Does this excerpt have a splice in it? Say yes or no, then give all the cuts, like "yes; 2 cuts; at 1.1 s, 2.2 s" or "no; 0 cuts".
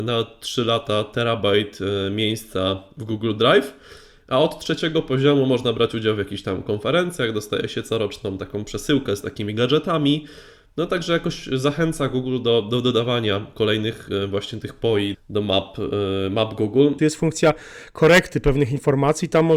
yes; 2 cuts; at 15.1 s, 17.0 s